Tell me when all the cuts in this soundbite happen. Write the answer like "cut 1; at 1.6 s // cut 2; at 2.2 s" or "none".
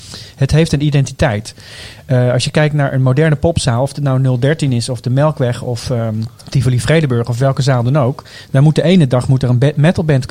cut 1; at 6.4 s